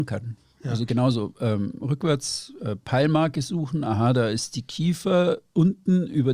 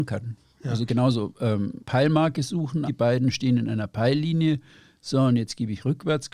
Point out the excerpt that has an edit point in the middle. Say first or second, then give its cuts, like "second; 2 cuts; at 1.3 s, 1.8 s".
second; 2 cuts; at 1.8 s, 2.9 s